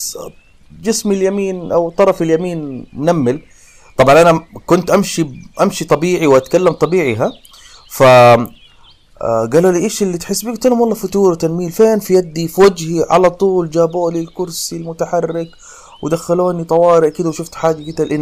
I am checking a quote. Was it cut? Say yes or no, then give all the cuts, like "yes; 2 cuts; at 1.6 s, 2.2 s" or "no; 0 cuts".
no; 0 cuts